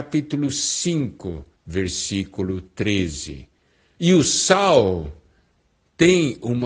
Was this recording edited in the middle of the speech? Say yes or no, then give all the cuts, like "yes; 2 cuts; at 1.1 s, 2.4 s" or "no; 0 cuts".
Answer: yes; 2 cuts; at 1.5 s, 3.9 s